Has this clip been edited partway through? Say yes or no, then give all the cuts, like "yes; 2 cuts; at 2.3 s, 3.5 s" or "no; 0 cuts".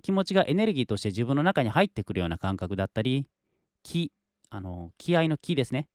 no; 0 cuts